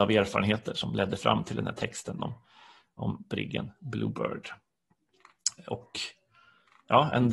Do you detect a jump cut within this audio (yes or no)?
no